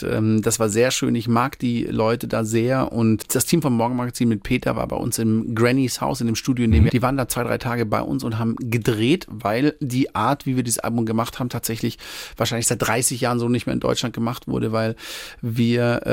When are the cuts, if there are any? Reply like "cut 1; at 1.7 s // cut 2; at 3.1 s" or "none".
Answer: cut 1; at 6.9 s